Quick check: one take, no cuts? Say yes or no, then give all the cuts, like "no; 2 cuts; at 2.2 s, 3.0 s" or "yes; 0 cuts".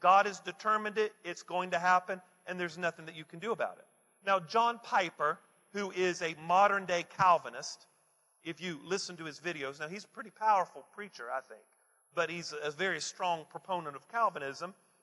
yes; 0 cuts